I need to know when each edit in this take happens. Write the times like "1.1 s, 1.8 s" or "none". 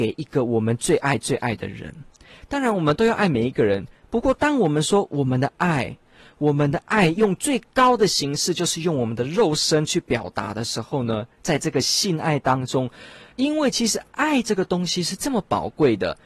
13.3 s